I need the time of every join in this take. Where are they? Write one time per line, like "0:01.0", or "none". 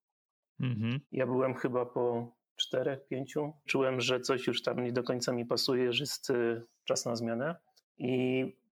0:01.0
0:03.7